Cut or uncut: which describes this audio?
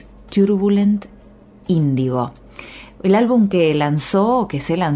uncut